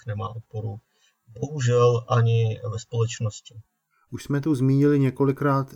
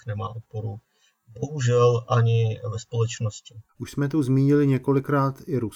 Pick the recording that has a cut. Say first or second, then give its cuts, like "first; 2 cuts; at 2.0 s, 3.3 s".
second; 1 cut; at 3.7 s